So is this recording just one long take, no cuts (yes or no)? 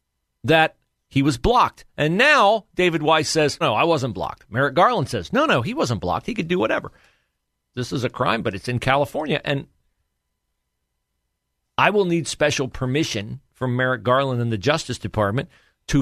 no